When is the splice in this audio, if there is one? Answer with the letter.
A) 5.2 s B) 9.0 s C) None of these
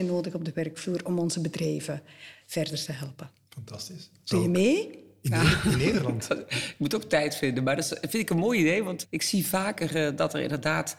B